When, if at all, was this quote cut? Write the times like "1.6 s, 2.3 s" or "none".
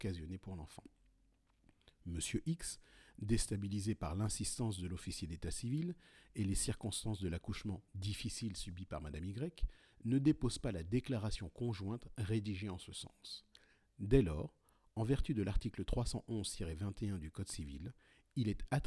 none